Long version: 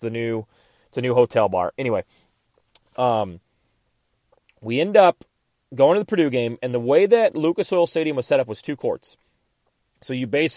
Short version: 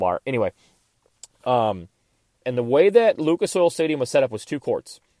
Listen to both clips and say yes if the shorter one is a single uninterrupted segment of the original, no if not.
no